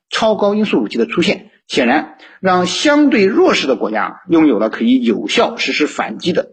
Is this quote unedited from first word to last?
yes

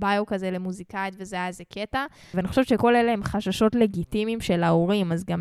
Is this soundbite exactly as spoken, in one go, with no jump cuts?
no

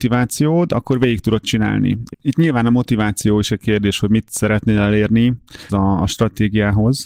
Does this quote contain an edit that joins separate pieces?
yes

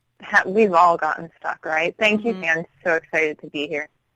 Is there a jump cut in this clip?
yes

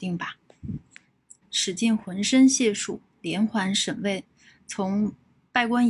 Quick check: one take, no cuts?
no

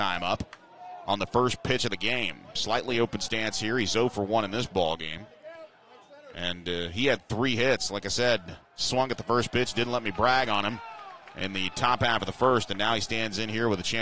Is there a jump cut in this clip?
no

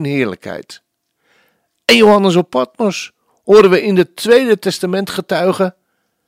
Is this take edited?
no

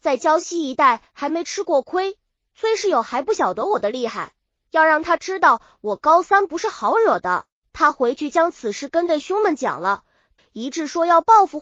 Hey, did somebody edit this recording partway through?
yes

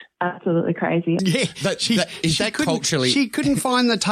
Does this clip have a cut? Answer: yes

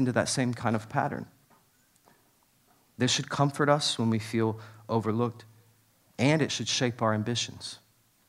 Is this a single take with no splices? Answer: yes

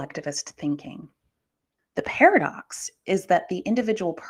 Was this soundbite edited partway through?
yes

